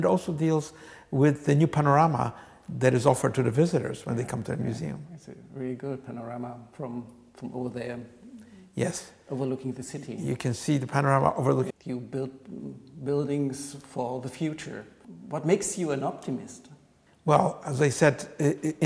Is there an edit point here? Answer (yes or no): yes